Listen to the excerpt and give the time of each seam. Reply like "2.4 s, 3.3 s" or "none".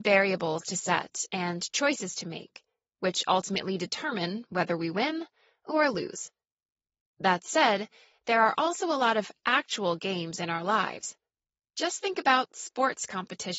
none